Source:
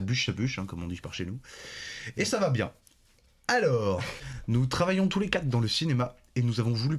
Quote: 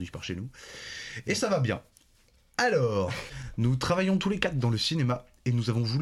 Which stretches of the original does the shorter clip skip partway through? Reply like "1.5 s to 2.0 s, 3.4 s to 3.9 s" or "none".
none